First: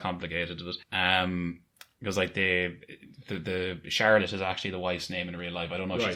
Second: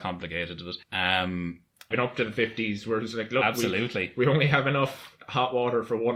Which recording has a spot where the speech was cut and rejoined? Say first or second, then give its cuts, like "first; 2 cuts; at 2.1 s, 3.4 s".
second; 1 cut; at 1.9 s